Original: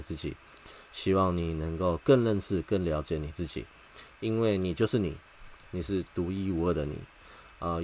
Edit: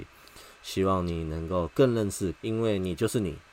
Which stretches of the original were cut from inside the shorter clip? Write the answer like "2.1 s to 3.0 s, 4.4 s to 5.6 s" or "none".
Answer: 2.6 s to 4.1 s